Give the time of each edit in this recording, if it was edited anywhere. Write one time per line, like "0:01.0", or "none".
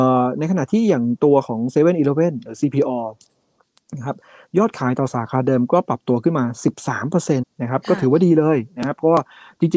0:07.4